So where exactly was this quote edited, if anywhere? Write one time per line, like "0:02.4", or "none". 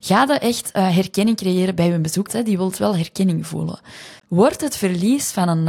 0:02.3
0:04.2